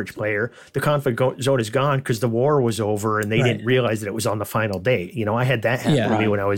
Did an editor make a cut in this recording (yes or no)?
no